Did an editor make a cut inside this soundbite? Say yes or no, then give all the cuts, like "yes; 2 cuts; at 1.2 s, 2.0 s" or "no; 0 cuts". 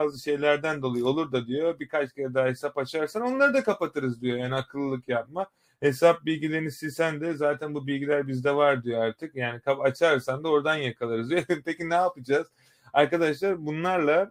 no; 0 cuts